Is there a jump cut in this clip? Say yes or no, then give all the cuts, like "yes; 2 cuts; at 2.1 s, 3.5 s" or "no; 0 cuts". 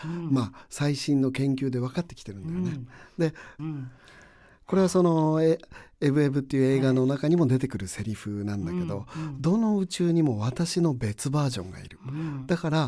yes; 1 cut; at 3.6 s